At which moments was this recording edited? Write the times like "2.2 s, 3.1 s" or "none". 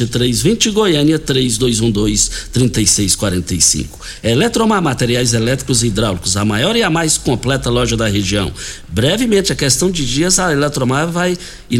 none

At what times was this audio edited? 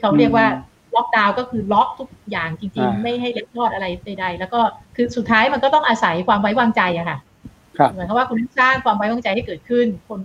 4.8 s

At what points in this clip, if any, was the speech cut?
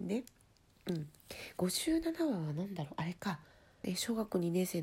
3.8 s

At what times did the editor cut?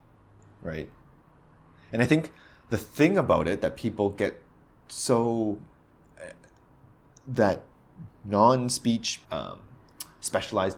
9.2 s

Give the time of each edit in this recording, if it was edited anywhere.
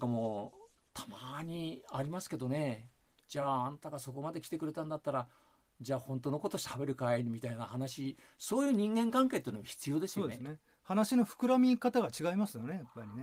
none

